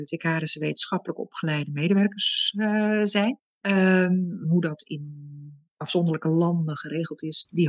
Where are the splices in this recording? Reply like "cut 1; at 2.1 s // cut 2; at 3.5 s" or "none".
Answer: cut 1; at 4.4 s